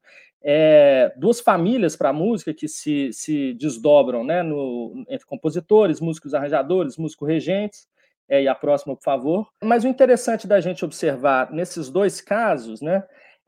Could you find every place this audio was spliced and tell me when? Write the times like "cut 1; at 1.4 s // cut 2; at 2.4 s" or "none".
cut 1; at 9.6 s